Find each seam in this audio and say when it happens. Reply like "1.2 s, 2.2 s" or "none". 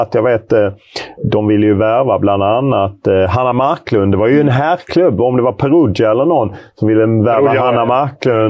none